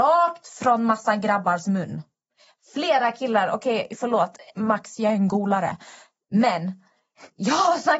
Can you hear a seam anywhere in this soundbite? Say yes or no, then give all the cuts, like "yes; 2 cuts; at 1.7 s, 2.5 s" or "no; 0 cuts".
no; 0 cuts